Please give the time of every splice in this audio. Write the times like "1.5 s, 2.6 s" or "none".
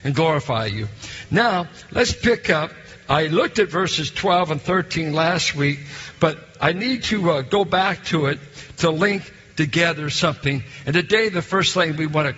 none